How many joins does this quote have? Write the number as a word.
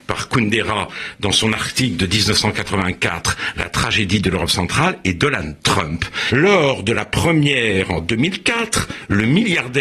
two